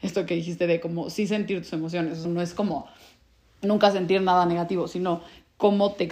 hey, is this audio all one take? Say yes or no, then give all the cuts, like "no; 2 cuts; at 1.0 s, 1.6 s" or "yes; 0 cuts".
no; 1 cut; at 2.2 s